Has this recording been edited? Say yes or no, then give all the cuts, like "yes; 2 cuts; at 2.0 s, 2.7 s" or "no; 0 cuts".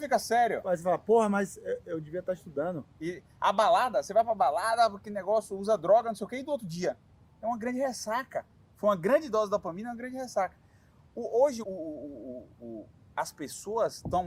yes; 1 cut; at 11.6 s